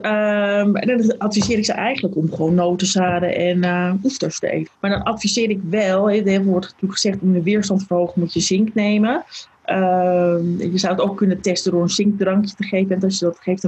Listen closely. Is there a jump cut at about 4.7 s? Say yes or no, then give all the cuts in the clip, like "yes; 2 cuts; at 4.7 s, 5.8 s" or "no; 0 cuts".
yes; 1 cut; at 4.7 s